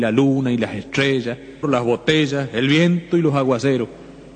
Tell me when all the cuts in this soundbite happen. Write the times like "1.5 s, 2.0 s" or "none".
1.6 s